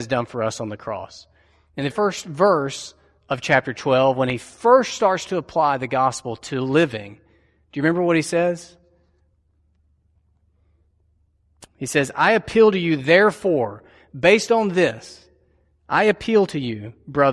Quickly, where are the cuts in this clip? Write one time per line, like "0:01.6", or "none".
0:01.9